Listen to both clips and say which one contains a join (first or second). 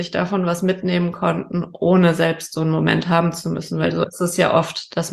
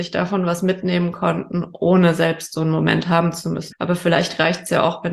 second